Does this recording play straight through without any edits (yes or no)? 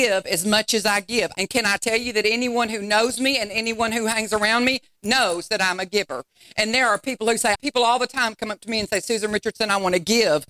no